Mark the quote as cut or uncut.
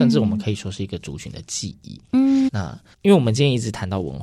cut